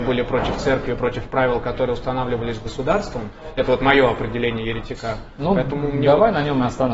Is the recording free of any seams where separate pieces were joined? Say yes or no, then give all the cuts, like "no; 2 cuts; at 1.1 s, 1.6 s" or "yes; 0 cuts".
yes; 0 cuts